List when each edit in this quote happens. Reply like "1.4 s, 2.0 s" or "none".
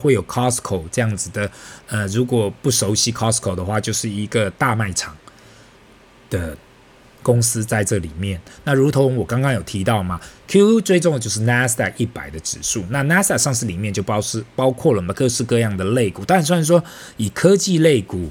none